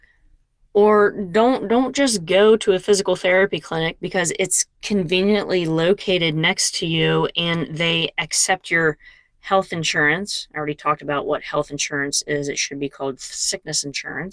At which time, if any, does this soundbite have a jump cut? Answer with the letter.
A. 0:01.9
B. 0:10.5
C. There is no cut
C